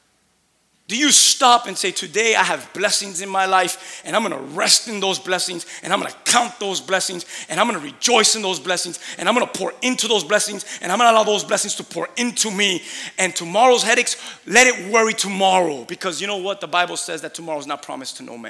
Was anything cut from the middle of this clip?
no; 0 cuts

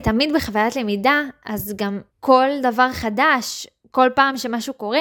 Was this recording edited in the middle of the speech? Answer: yes; 1 cut; at 2.1 s

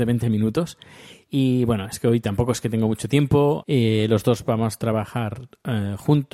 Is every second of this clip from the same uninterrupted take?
no; 1 cut; at 3.6 s

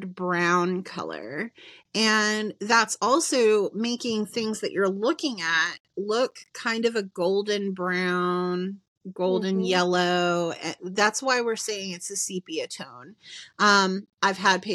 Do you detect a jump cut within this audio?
no; 0 cuts

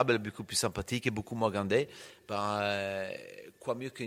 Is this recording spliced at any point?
no; 0 cuts

